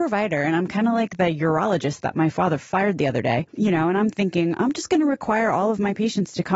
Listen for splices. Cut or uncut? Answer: uncut